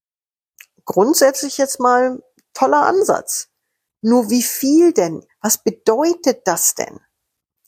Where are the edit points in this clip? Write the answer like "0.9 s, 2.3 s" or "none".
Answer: 5.3 s